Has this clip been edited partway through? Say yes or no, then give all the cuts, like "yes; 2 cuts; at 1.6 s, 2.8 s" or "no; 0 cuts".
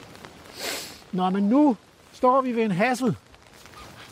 no; 0 cuts